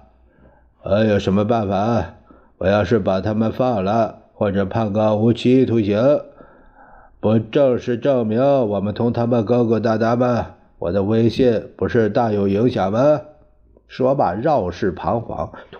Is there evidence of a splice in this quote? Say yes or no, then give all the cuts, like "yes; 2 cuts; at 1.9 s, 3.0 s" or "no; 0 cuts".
no; 0 cuts